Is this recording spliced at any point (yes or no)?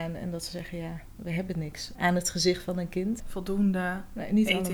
yes